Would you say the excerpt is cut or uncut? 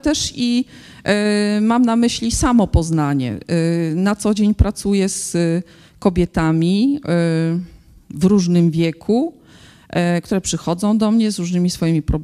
uncut